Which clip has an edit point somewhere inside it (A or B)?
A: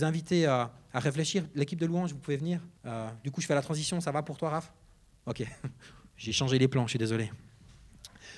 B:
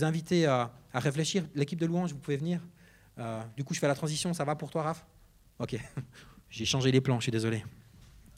A